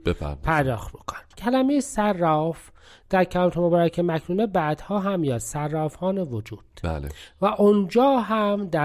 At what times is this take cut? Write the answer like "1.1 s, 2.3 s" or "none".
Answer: 1.3 s